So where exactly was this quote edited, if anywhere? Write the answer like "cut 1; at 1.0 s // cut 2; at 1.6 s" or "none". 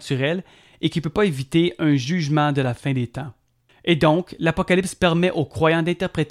none